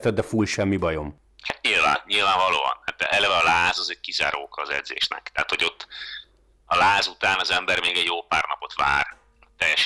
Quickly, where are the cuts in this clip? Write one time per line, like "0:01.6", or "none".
none